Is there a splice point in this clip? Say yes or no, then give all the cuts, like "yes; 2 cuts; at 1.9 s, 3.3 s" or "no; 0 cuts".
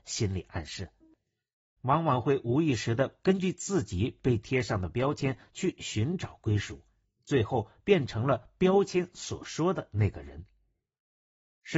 yes; 2 cuts; at 1.8 s, 7.0 s